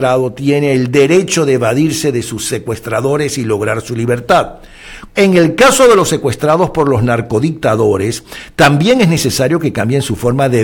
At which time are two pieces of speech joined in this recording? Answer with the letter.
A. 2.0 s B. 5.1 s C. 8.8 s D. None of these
B